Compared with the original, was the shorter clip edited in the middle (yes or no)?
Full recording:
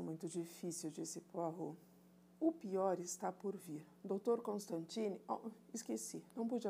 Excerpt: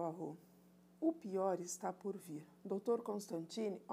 no